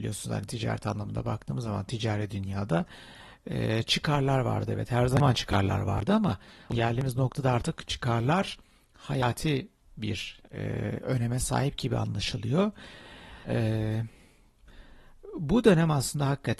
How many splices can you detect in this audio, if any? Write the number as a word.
one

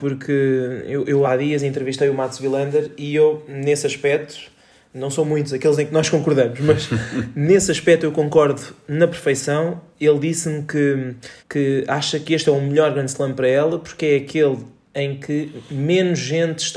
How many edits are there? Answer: two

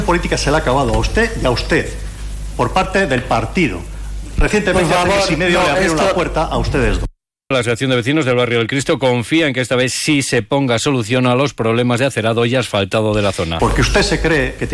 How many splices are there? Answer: two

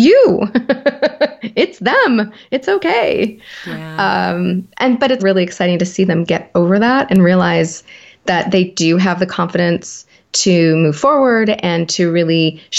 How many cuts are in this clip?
one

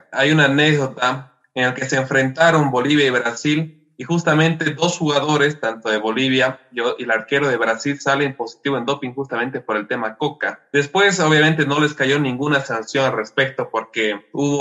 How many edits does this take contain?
zero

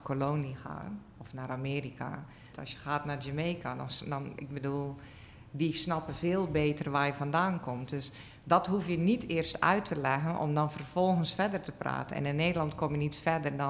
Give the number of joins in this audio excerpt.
one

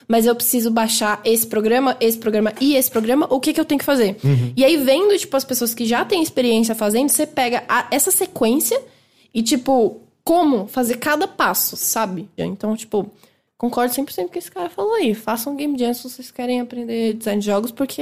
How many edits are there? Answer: one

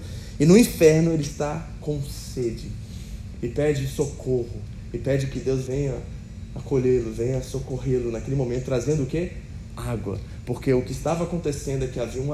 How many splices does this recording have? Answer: zero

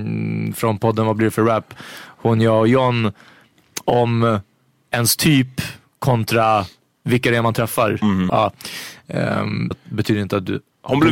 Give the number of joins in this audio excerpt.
two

